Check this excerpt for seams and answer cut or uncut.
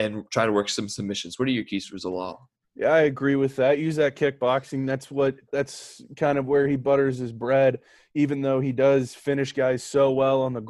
uncut